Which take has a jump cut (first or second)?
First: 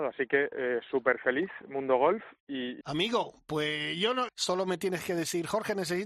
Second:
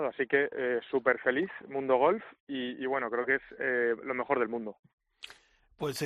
first